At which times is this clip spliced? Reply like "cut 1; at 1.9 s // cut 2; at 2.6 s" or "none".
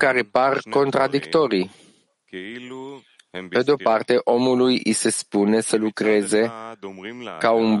none